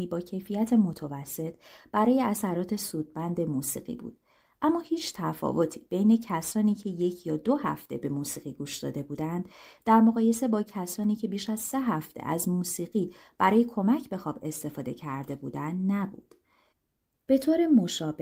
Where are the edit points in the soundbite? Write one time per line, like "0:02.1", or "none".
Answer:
none

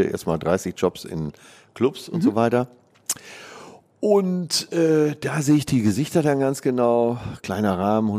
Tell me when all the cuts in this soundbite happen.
none

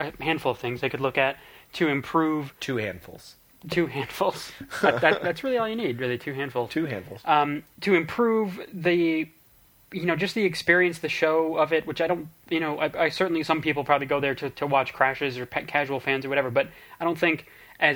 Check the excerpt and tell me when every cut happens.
none

